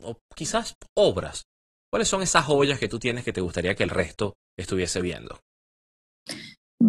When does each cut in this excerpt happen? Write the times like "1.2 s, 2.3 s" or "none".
1.8 s